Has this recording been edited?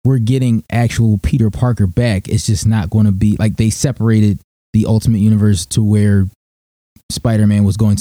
no; 0 cuts

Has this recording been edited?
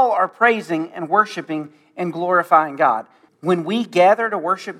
yes; 1 cut; at 3.3 s

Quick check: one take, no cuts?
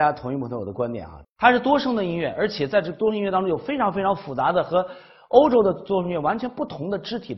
no; 1 cut; at 1.2 s

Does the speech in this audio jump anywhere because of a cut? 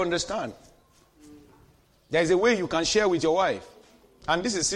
no; 0 cuts

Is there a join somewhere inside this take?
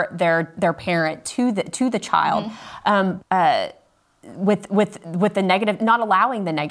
yes; 1 cut; at 3.2 s

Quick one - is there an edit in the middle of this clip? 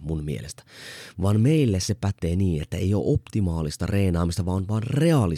no; 0 cuts

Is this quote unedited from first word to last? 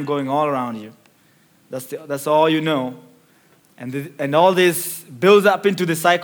no; 1 cut; at 3.6 s

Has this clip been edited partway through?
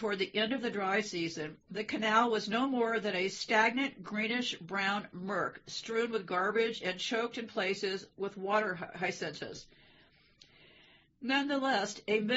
no; 0 cuts

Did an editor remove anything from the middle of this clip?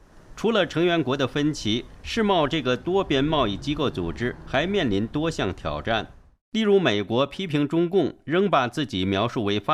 no; 0 cuts

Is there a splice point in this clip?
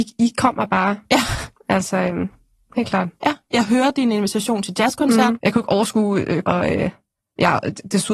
yes; 2 cuts; at 5.4 s, 6.4 s

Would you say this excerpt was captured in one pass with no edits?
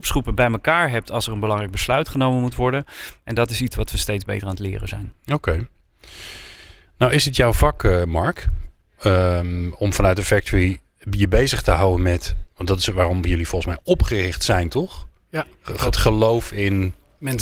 yes; 0 cuts

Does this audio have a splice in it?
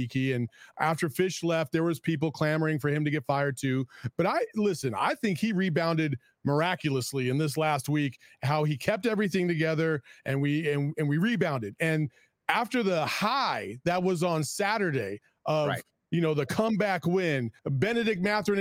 yes; 1 cut; at 17.6 s

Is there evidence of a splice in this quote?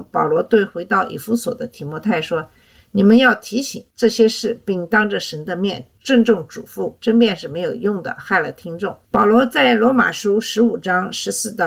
yes; 2 cuts; at 7.0 s, 9.0 s

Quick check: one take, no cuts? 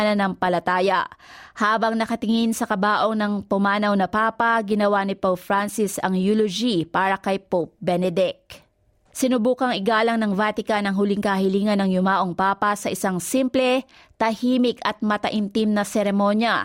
no; 1 cut; at 9.1 s

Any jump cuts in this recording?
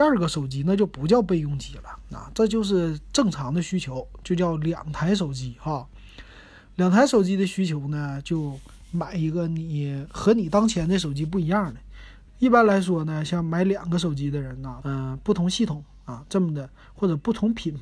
yes; 2 cuts; at 12.3 s, 14.8 s

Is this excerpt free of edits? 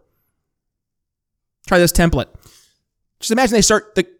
no; 1 cut; at 3.0 s

